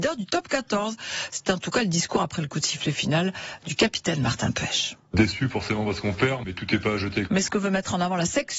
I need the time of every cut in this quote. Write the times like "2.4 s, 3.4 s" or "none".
7.3 s